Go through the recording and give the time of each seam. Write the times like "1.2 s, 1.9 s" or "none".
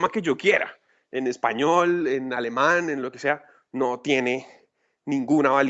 none